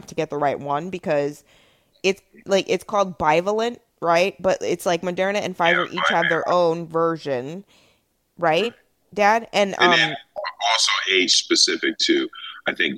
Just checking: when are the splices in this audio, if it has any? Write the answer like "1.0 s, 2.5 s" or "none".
none